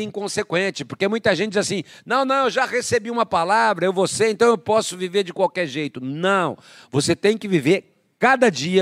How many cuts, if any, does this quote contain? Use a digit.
0